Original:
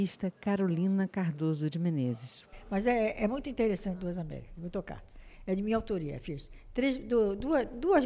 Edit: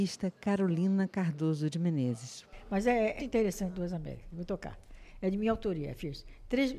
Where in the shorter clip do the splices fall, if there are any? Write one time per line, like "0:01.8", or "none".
0:03.2